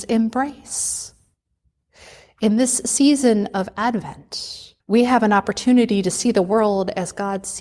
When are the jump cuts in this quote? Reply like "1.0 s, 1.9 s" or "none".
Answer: 4.8 s